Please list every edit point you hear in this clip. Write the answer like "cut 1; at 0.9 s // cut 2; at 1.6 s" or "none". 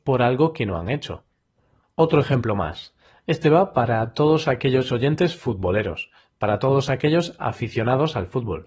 none